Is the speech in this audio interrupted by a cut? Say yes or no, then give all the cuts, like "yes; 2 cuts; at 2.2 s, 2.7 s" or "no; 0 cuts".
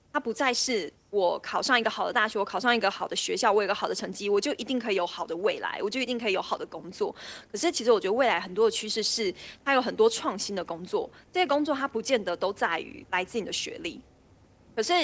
no; 0 cuts